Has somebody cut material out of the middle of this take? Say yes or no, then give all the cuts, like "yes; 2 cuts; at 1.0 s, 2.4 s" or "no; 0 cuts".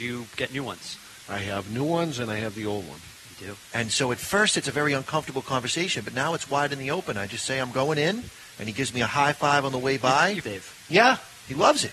yes; 2 cuts; at 3.7 s, 10.4 s